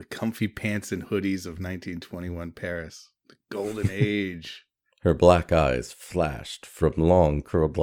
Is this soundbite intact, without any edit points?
no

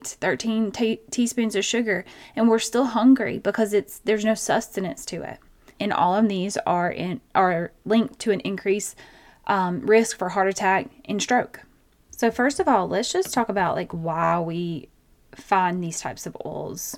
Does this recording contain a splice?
yes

